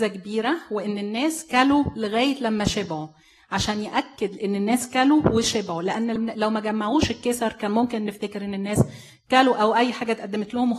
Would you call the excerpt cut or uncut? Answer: cut